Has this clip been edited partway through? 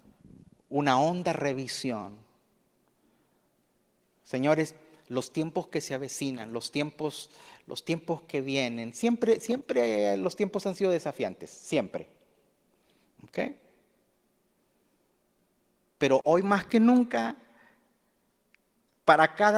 no; 0 cuts

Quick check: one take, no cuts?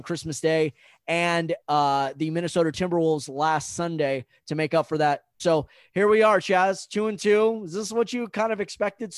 no; 1 cut; at 5.4 s

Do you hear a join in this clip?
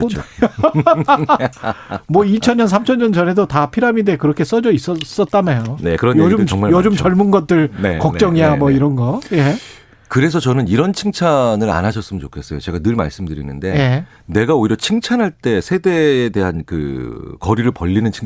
no; 0 cuts

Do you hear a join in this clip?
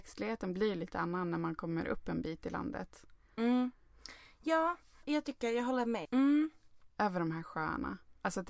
yes; 2 cuts; at 5.0 s, 6.0 s

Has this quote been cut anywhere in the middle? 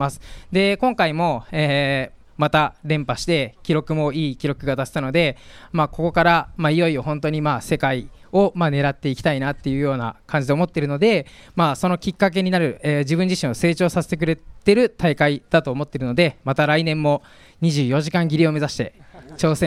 no; 0 cuts

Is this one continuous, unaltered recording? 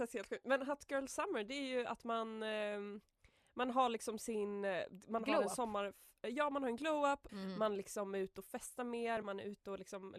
no; 2 cuts; at 7.3 s, 9.2 s

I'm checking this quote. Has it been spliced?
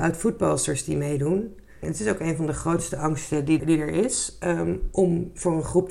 yes; 2 cuts; at 1.8 s, 3.6 s

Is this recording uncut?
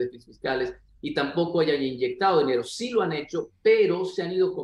yes; 0 cuts

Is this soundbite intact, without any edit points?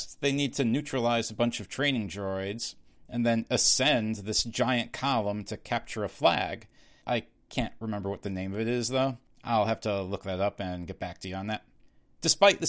no; 1 cut; at 7.0 s

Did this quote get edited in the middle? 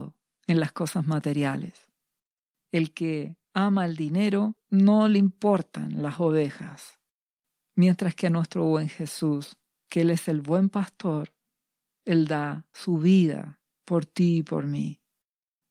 no; 0 cuts

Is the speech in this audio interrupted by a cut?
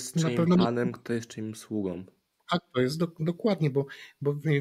no; 0 cuts

